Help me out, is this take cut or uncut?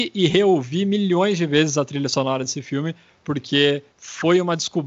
cut